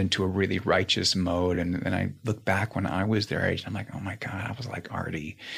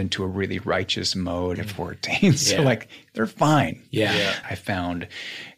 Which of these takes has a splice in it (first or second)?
second